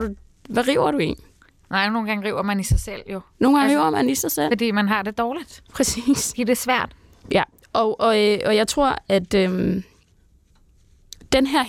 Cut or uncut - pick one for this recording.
cut